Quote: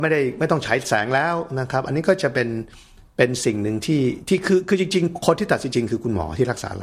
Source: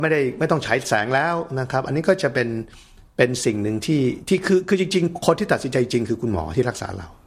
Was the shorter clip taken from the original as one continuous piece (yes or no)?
no